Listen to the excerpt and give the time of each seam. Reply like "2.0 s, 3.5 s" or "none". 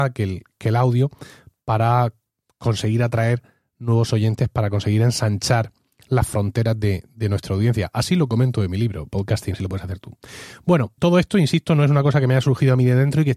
9.5 s, 11.0 s